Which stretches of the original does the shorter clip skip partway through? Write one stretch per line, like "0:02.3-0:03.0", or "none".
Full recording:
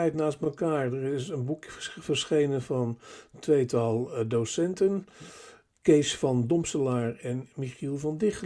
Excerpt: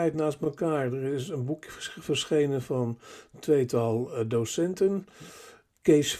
none